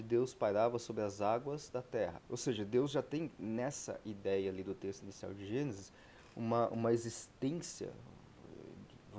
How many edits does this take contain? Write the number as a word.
two